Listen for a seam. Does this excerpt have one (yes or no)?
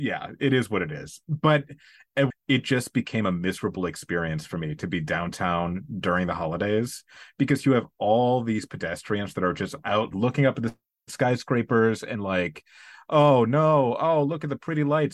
yes